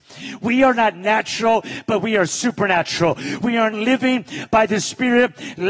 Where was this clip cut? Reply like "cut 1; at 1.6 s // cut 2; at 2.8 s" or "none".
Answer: cut 1; at 3.7 s